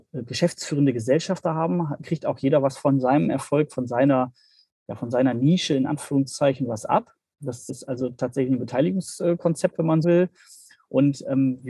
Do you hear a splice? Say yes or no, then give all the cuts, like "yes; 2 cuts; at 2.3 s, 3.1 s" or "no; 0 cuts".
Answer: yes; 2 cuts; at 7.7 s, 10.0 s